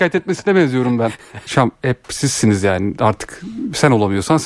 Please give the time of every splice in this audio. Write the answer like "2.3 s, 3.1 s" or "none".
1.5 s